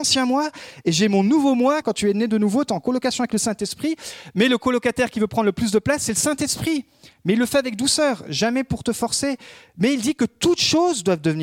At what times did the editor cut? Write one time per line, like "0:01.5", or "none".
0:01.8